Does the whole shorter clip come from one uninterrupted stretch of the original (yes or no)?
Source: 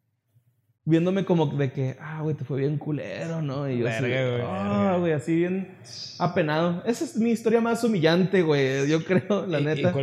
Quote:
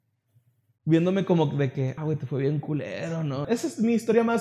no